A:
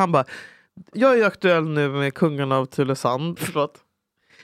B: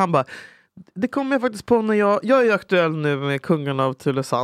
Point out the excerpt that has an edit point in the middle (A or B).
A